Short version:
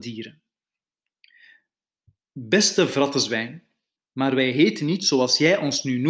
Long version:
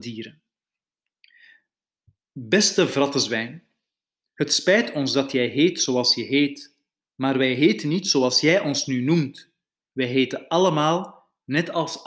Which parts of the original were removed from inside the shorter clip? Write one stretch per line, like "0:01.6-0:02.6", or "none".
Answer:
0:04.0-0:07.0

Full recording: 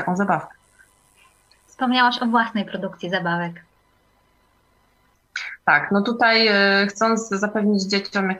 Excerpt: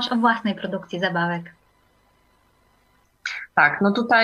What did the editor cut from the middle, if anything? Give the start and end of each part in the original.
none

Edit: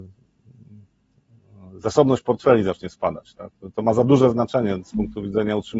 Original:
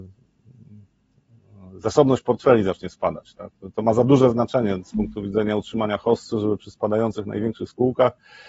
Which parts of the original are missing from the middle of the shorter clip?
none

